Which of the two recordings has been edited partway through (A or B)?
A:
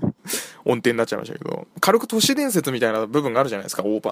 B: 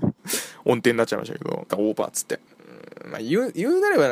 B